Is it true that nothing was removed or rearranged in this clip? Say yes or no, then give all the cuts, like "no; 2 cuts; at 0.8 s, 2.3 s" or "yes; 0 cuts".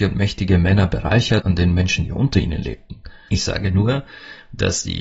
no; 2 cuts; at 1.4 s, 3.3 s